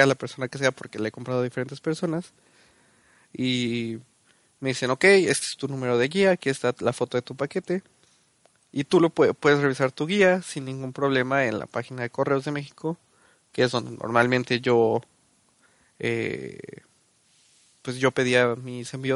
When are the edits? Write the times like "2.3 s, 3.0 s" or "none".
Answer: none